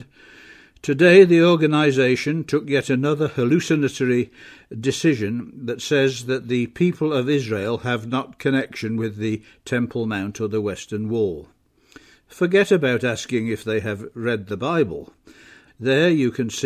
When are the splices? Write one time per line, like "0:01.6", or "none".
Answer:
0:15.7